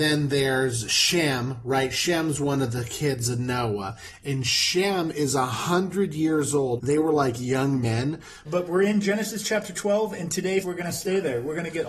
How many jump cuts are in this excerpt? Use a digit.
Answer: 3